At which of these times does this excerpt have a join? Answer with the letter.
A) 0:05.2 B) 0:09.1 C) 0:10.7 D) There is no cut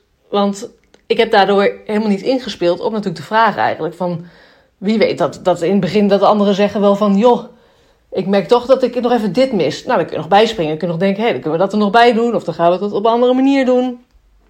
D